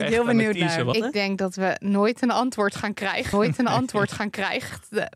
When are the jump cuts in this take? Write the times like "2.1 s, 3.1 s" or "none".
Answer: 0.9 s